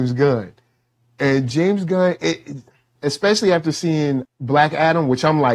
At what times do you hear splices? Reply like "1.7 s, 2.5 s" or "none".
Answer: 3.0 s, 4.3 s